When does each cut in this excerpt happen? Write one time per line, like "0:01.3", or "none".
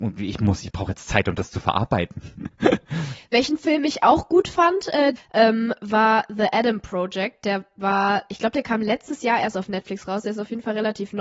0:05.1